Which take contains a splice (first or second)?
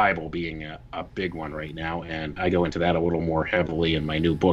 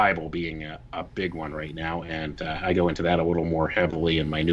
first